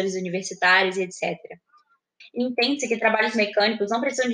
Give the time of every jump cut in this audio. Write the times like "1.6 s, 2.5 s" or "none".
2.2 s